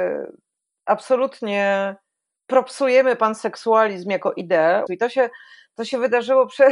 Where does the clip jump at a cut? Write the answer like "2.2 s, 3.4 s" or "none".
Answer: 4.9 s